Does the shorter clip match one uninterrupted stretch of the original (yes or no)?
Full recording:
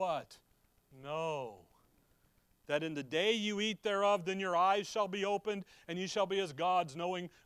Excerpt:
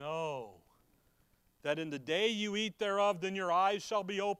yes